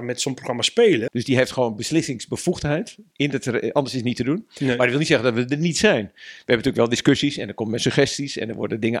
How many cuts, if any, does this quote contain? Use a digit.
1